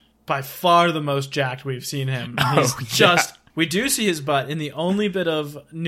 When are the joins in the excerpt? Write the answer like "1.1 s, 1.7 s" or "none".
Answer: none